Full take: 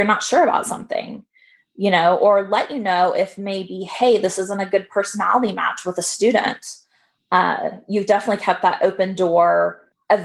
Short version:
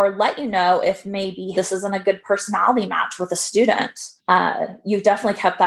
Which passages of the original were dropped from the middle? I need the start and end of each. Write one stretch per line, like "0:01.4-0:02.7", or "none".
0:03.9-0:04.2
0:06.8-0:07.2

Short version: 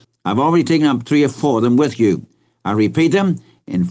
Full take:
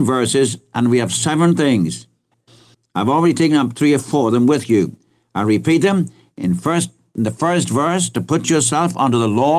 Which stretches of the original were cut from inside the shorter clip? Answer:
none

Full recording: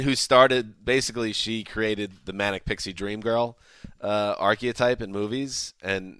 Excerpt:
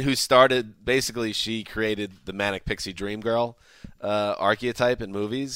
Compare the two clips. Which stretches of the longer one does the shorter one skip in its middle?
none

